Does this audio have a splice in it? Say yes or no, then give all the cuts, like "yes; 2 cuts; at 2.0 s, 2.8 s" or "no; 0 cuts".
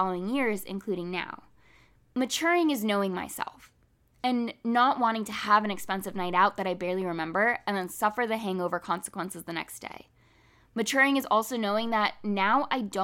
no; 0 cuts